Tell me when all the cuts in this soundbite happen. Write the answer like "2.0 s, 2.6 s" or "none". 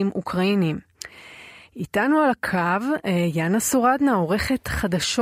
none

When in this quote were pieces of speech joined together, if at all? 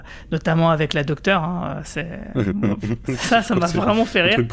none

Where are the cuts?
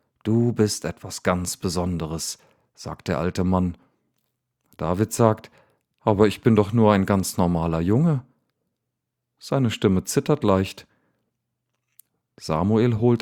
none

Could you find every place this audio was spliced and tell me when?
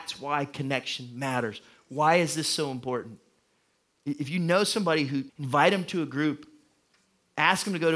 5.3 s

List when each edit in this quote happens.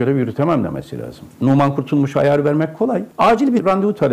1.3 s

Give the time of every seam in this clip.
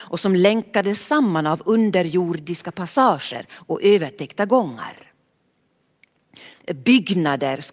6.6 s

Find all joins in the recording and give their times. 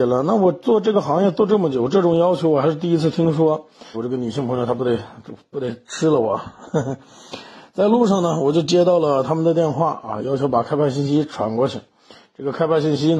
3.9 s

